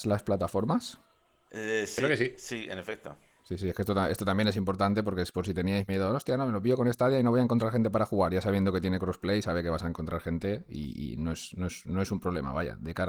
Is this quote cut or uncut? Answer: uncut